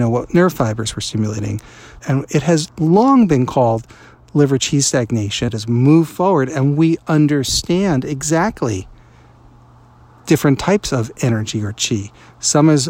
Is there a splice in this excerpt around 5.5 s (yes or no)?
yes